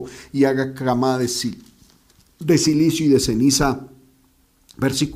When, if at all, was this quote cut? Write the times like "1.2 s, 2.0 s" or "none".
none